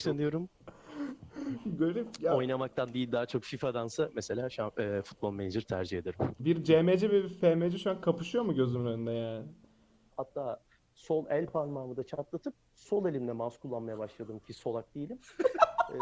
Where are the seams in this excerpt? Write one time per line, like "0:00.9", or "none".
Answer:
0:06.4
0:10.1